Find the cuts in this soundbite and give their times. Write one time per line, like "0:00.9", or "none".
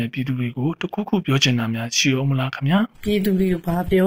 0:02.9